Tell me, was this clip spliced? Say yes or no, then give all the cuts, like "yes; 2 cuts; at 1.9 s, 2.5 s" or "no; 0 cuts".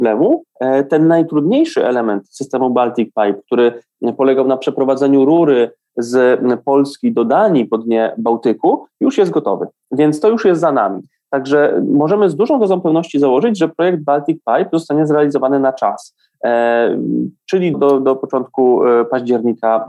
yes; 1 cut; at 17.7 s